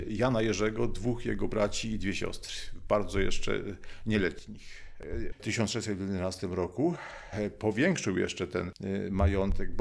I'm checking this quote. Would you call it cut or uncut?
cut